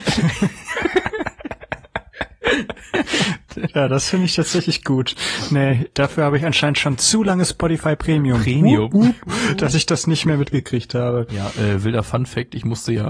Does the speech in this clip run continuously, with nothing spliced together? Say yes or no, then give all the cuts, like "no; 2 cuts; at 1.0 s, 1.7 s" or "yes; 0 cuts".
yes; 0 cuts